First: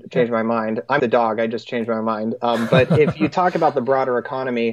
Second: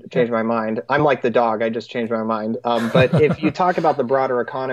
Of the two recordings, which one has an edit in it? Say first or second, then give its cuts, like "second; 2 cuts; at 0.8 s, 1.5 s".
first; 1 cut; at 1.0 s